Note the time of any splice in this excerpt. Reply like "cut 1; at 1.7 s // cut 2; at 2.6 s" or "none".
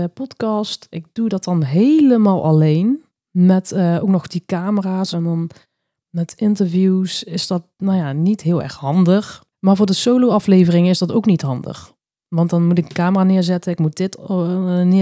cut 1; at 5.1 s // cut 2; at 9.5 s